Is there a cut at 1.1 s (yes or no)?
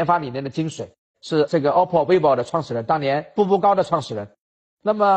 yes